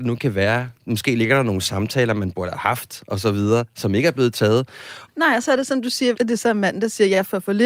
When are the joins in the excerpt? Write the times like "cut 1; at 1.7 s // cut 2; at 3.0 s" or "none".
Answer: cut 1; at 5.1 s // cut 2; at 6.1 s